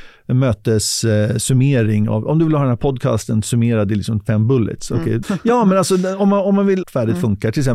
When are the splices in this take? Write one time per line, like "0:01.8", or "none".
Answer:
0:05.2
0:06.8